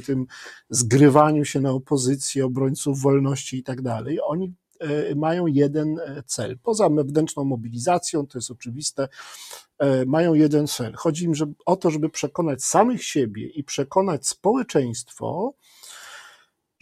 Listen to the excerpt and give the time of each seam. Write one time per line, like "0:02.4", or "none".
none